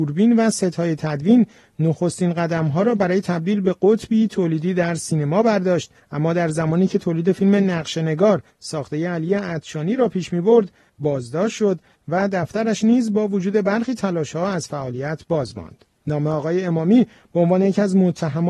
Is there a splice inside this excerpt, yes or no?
yes